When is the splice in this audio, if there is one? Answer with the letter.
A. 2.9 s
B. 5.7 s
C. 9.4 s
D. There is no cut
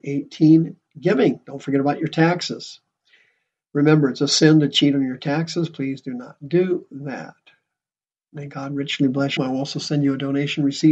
C